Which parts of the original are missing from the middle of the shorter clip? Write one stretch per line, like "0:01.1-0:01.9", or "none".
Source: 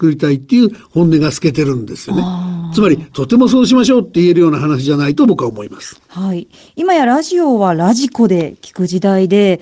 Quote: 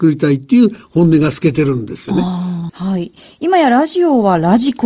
0:02.7-0:06.0

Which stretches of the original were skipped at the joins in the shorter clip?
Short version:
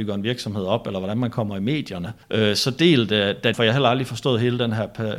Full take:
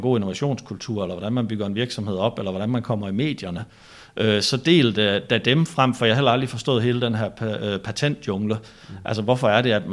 0:03.7-0:04.1
0:05.4-0:06.0

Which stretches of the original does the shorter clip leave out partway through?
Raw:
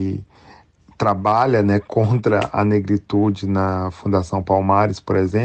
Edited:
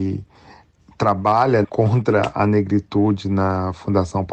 0:01.6-0:01.8

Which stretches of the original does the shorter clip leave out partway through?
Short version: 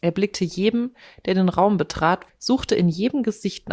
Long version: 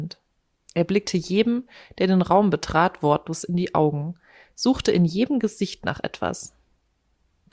0:03.0-0:04.4

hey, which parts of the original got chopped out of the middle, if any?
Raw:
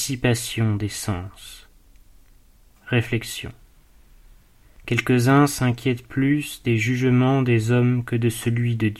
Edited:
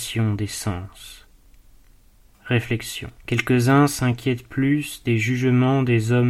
0:03.6-0:04.7

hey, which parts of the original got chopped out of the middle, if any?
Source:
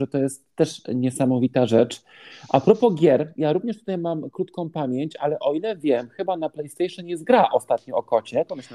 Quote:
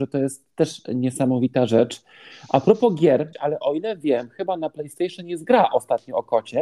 0:03.3-0:05.1

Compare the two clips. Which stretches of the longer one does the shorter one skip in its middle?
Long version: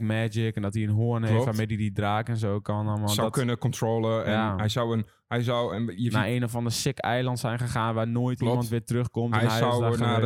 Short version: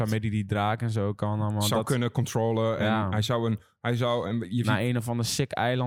none

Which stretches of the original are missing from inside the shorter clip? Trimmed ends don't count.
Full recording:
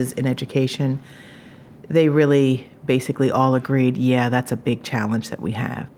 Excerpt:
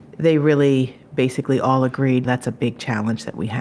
0:04.0-0:04.3

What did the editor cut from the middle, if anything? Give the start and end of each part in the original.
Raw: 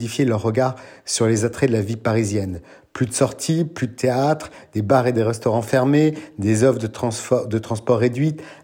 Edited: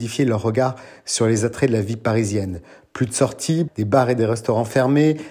0:03.7-0:04.6

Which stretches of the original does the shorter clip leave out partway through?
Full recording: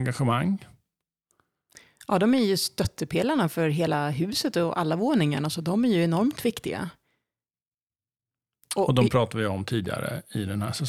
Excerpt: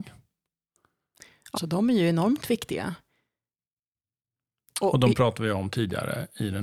0:02.1-0:05.5

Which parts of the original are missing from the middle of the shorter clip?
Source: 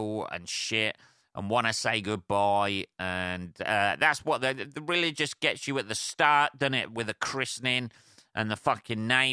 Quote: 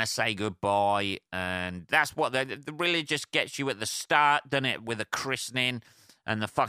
0:03.6-0:04.0

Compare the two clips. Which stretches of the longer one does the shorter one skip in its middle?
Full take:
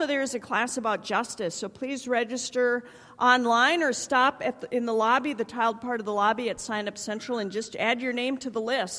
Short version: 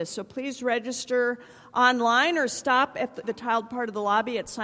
0:04.7-0:05.4

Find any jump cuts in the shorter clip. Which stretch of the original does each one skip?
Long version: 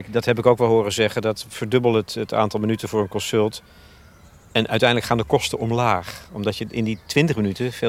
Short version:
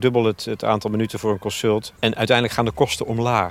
0:03.6-0:04.5

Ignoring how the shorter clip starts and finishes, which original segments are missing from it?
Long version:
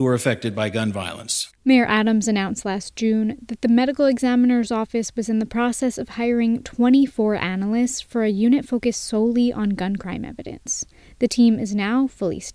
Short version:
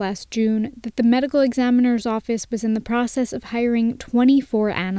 none

